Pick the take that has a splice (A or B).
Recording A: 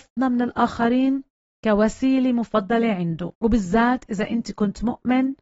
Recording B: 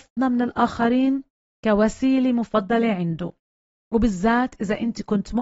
A